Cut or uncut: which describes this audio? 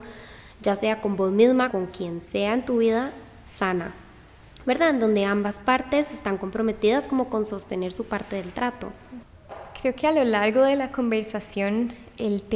cut